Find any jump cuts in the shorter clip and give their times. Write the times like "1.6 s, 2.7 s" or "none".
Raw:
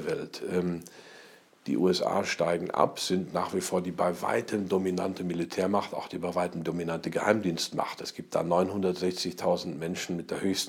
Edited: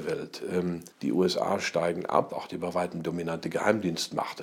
0.9 s, 2.3 s